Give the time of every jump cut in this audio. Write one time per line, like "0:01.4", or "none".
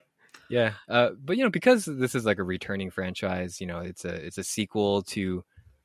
none